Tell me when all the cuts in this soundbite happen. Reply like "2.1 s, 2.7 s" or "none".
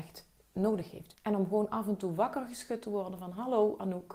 1.1 s